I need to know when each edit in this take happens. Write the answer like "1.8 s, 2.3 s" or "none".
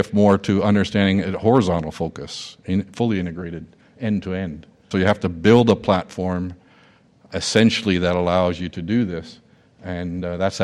4.9 s